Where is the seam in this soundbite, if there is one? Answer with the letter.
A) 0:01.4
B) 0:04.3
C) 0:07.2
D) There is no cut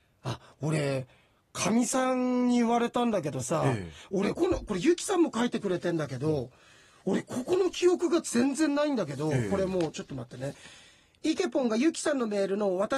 B